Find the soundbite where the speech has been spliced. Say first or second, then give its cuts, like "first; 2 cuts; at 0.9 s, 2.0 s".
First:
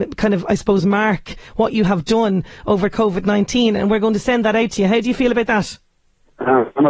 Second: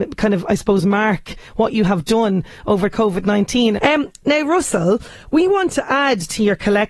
second; 1 cut; at 3.8 s